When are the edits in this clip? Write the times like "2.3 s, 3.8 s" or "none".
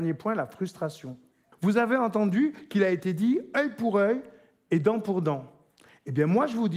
1.5 s